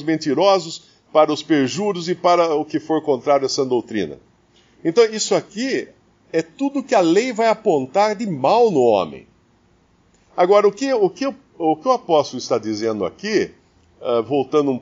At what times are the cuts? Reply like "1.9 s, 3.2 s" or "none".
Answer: none